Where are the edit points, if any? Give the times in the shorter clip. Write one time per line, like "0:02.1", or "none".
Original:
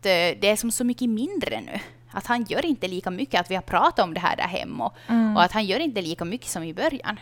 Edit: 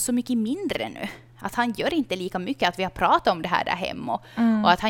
none